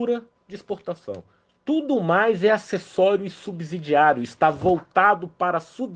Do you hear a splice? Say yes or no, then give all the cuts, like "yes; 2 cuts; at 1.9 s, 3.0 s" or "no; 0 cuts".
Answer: no; 0 cuts